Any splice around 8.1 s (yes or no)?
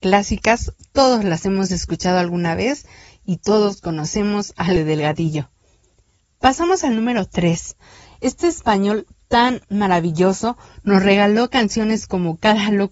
yes